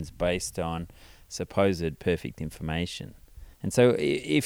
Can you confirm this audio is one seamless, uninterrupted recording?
no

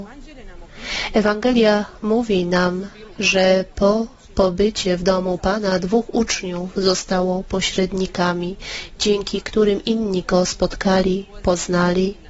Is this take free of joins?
yes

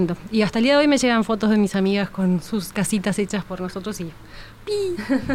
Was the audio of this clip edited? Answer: no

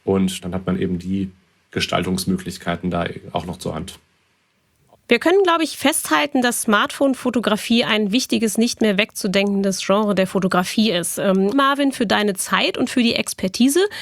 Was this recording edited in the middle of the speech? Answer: yes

